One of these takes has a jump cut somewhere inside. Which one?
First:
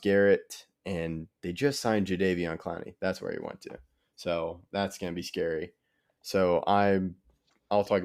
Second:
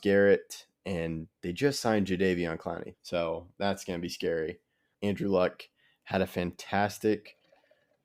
second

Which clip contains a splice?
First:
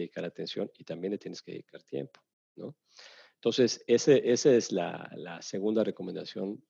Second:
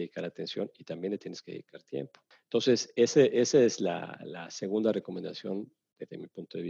second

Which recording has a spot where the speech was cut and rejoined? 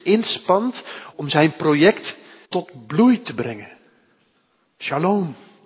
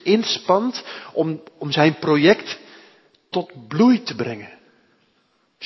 first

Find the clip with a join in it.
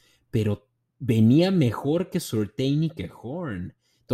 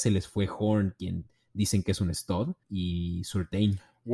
second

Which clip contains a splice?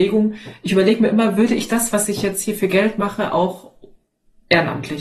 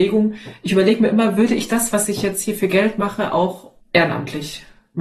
second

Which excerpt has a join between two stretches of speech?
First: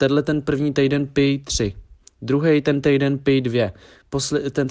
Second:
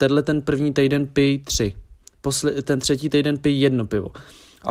second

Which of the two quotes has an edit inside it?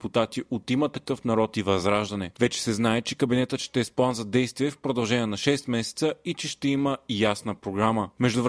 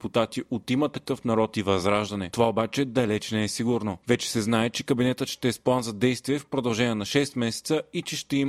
first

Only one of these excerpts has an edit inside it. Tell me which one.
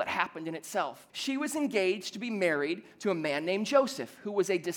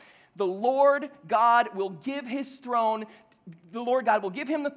first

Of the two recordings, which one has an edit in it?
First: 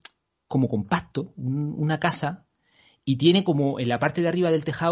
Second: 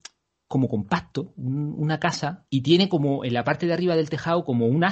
second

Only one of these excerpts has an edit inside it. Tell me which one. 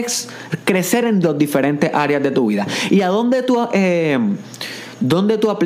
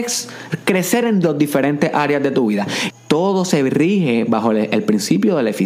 second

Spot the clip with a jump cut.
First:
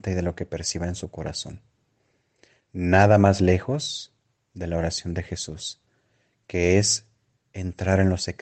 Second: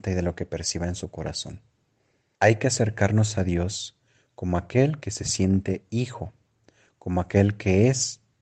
second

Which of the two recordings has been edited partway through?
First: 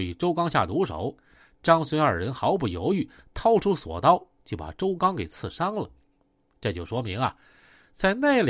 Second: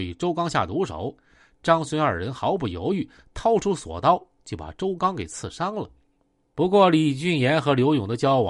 second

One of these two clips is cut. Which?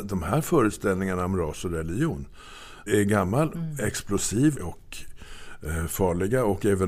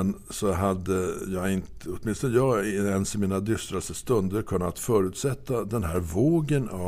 first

